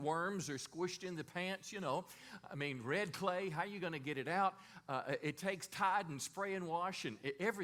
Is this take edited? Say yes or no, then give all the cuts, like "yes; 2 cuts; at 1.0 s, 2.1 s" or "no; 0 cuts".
no; 0 cuts